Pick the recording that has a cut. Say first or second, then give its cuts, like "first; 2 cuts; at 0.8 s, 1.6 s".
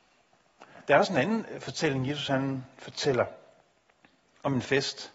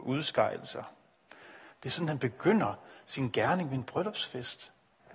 second; 1 cut; at 1.7 s